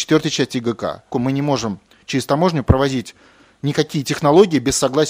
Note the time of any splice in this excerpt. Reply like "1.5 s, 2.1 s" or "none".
1.1 s

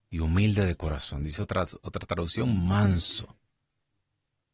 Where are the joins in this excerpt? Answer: none

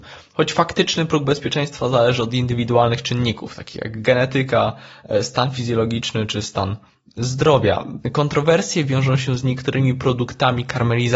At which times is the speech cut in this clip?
8.0 s

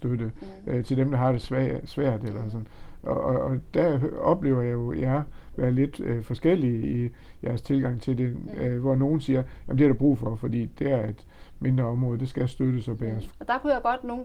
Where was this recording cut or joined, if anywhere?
10.8 s, 13.3 s

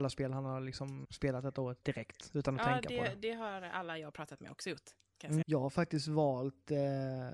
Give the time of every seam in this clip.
1.0 s, 5.4 s

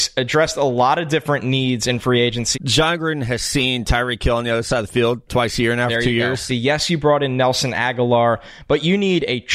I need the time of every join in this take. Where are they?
2.5 s, 5.3 s, 6.5 s

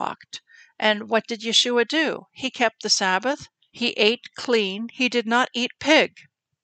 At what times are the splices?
3.7 s

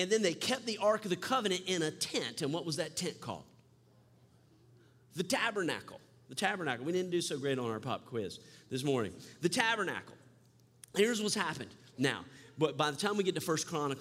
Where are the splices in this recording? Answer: none

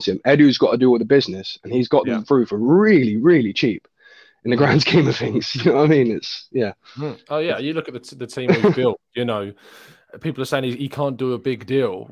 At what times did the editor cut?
none

